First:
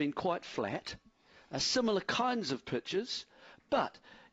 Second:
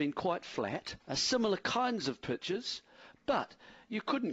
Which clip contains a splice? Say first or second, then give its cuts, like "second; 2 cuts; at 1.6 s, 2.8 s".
second; 1 cut; at 1.0 s